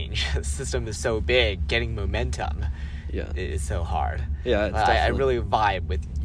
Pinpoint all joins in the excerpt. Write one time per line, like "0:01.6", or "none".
0:01.0